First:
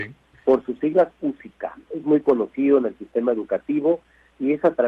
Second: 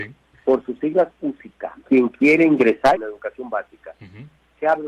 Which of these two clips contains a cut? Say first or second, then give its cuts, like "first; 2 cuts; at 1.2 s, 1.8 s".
second; 2 cuts; at 1.8 s, 3.0 s